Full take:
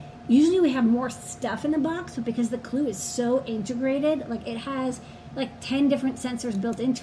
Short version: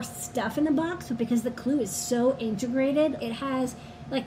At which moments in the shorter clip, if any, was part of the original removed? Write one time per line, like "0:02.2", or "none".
0:03.2